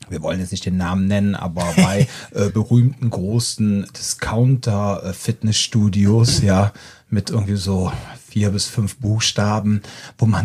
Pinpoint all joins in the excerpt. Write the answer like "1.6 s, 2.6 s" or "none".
none

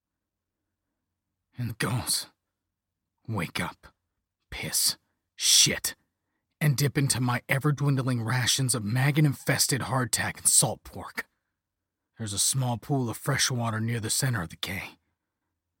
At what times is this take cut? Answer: 1.7 s, 12.1 s

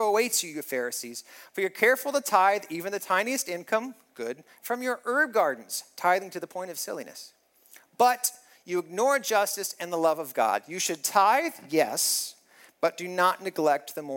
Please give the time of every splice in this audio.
none

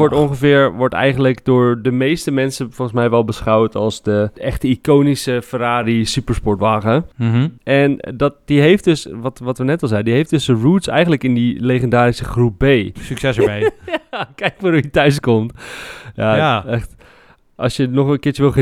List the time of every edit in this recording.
13.0 s

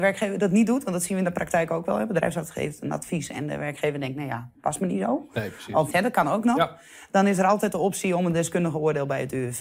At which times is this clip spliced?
5.9 s

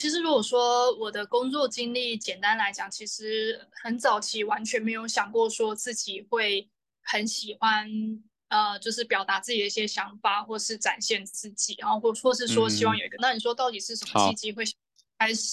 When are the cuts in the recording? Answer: 12.1 s, 13.2 s

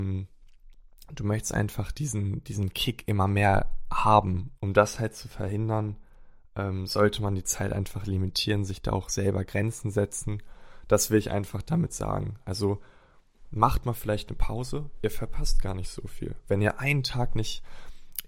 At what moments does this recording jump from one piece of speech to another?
4.6 s

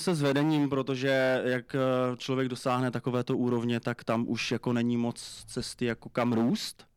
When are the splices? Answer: none

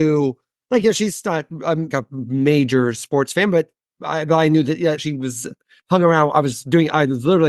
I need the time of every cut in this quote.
1.9 s, 5.0 s

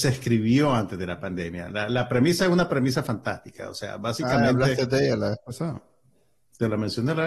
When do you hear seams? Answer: none

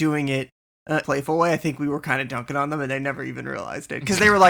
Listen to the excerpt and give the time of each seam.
1.0 s

